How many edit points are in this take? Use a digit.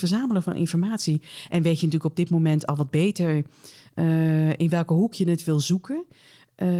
0